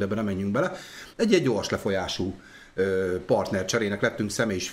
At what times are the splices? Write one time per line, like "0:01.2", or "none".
0:01.1